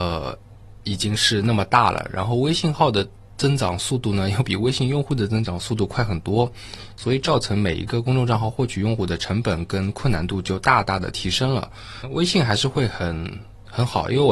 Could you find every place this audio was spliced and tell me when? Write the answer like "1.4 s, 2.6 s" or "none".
none